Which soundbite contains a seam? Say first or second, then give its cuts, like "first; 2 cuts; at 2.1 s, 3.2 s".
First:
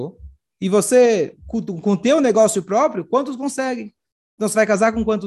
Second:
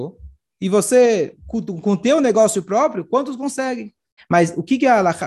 second; 1 cut; at 4.2 s